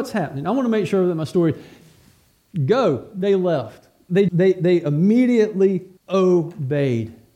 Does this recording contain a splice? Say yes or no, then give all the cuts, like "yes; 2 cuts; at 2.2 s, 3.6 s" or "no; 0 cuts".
yes; 2 cuts; at 4.3 s, 6.0 s